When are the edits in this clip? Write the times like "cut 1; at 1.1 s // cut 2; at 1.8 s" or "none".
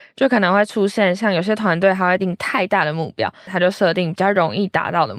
cut 1; at 2.2 s // cut 2; at 3.5 s

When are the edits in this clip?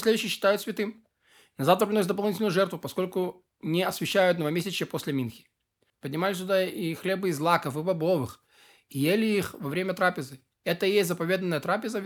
cut 1; at 5.9 s

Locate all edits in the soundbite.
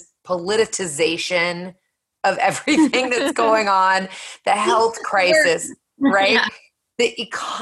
none

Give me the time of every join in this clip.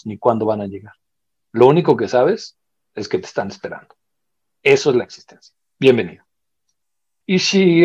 none

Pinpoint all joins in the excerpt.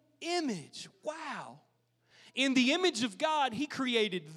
none

